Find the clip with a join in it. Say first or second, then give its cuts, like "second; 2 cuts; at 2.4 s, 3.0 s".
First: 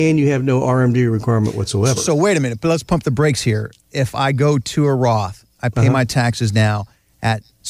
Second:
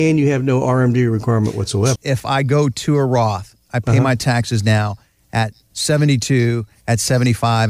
second; 1 cut; at 2.0 s